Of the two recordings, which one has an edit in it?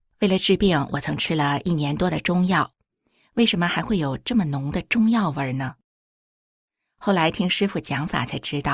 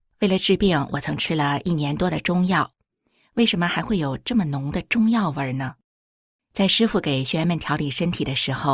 second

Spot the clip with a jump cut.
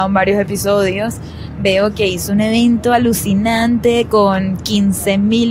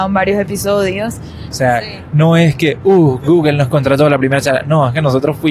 second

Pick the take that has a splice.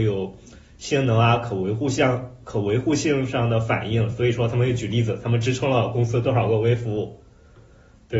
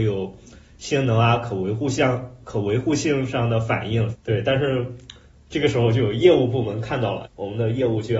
second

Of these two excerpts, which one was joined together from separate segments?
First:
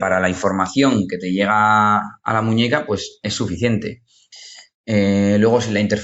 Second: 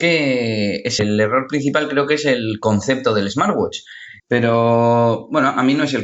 second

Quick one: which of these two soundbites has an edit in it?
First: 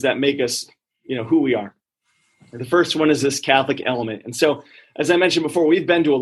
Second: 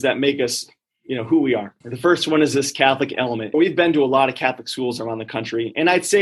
second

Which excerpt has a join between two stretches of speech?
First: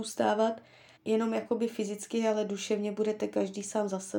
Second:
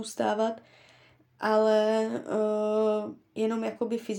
first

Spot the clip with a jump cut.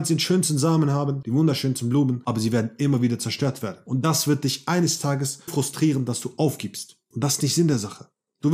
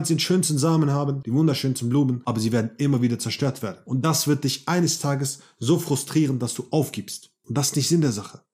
first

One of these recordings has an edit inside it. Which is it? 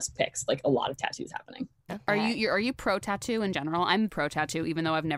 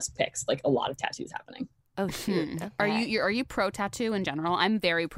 first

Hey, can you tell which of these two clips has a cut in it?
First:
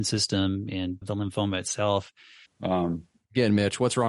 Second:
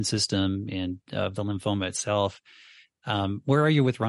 first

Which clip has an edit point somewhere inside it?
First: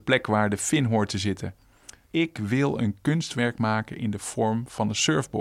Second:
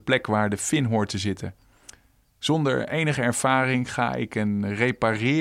first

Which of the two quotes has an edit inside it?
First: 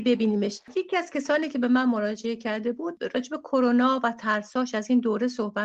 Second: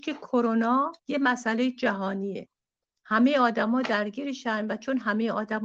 second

